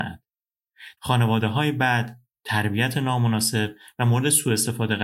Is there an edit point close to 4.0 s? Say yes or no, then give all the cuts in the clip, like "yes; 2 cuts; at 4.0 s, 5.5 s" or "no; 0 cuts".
no; 1 cut; at 1.0 s